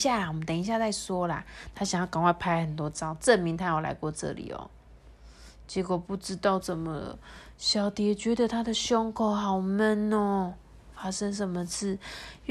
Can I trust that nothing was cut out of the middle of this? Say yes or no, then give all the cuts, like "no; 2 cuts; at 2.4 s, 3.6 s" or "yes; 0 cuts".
yes; 0 cuts